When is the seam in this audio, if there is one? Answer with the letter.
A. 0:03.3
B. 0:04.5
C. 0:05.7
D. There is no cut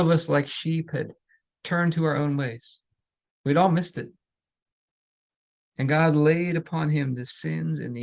D